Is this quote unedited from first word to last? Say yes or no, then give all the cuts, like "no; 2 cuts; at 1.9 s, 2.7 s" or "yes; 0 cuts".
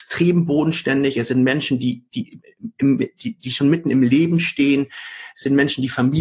yes; 0 cuts